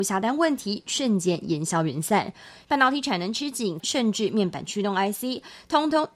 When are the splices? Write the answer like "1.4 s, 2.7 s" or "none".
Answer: 2.6 s, 3.8 s